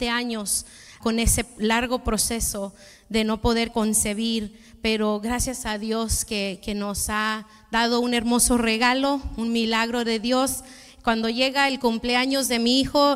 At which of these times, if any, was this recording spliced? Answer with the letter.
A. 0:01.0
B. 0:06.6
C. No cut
A